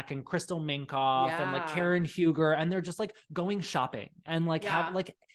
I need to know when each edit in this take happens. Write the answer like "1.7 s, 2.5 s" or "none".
none